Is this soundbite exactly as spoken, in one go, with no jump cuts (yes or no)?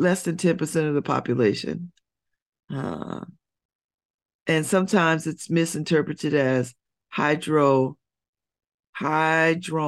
yes